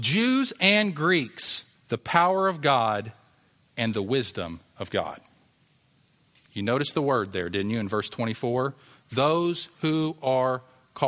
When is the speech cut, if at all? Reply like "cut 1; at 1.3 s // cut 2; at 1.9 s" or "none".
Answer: cut 1; at 1.8 s